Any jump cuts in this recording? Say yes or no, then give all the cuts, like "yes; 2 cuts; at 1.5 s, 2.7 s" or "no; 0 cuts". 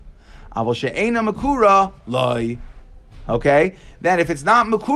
no; 0 cuts